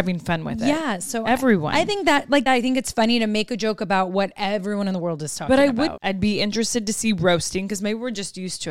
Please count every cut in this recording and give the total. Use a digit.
2